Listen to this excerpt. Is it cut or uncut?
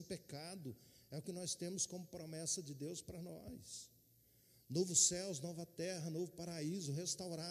uncut